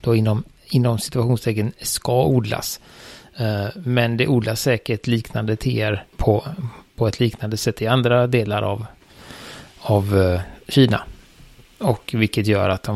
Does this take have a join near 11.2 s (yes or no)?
no